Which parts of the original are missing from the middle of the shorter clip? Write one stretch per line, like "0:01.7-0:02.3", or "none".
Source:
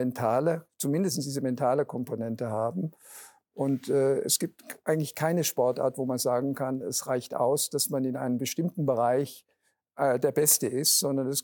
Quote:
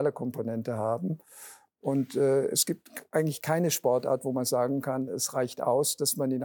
none